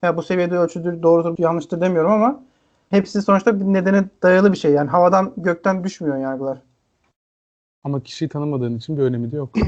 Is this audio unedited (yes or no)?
no